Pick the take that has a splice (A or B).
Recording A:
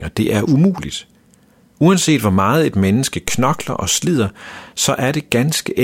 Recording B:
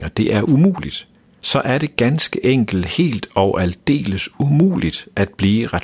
B